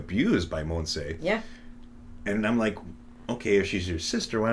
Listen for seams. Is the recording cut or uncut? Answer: uncut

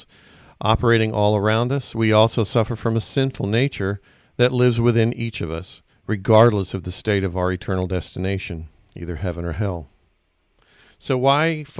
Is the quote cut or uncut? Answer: uncut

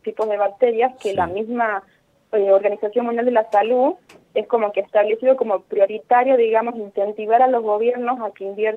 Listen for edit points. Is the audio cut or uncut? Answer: uncut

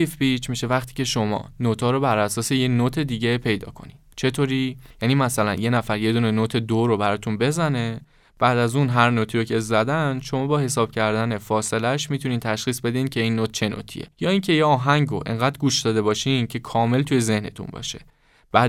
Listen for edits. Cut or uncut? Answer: cut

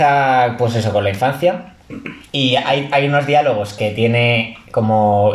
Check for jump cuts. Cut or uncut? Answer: cut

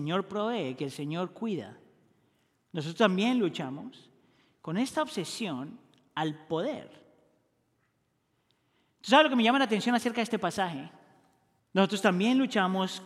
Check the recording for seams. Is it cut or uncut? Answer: cut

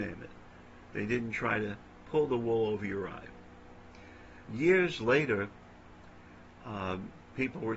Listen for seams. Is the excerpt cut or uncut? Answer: cut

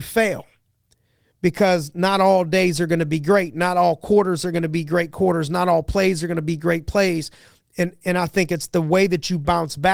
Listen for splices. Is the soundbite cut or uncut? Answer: uncut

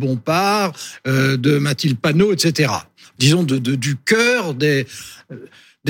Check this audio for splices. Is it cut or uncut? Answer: uncut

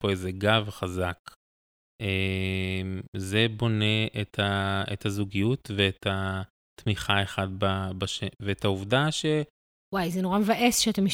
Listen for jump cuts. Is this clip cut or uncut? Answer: cut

